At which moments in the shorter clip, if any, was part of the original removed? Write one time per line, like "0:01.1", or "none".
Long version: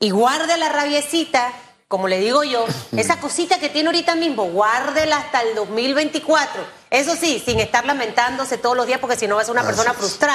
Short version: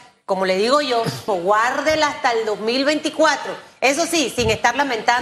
0:01.3